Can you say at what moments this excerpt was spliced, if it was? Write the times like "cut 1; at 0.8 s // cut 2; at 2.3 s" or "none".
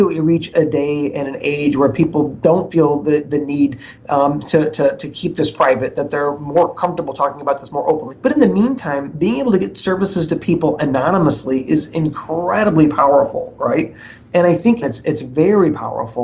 cut 1; at 8.1 s // cut 2; at 14.8 s